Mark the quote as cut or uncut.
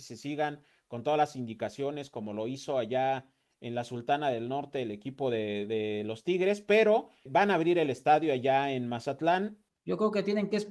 cut